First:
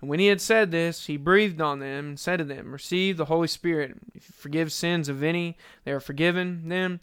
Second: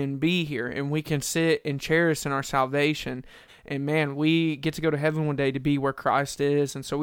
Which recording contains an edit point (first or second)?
second